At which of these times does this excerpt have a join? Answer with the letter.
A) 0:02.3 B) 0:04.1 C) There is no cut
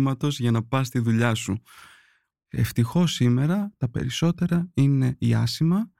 A